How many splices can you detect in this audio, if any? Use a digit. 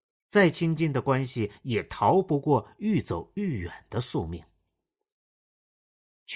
1